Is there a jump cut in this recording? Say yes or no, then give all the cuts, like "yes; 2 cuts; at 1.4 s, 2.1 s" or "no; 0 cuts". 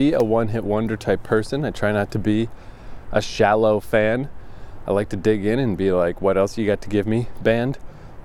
no; 0 cuts